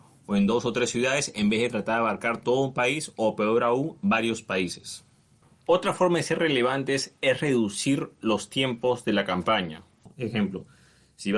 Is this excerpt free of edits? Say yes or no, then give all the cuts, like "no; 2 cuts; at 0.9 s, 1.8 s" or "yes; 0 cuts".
yes; 0 cuts